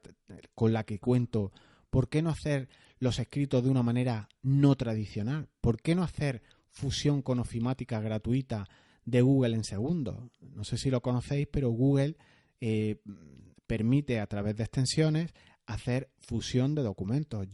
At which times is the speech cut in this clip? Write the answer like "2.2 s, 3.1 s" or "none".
none